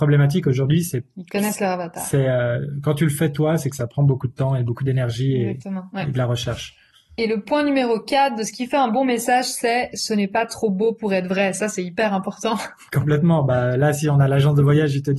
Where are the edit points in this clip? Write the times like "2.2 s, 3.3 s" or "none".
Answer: none